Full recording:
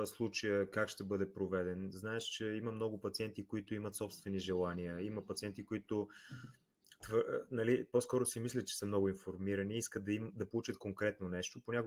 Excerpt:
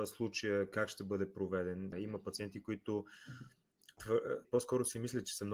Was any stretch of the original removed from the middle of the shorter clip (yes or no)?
yes